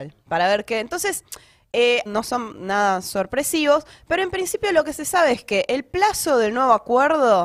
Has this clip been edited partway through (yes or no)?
yes